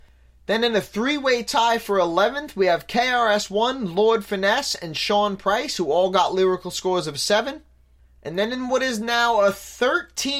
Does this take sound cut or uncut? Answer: uncut